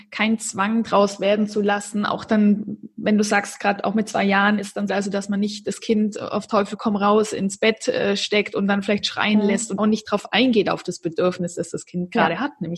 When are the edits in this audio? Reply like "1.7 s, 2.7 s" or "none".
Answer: 4.9 s, 9.8 s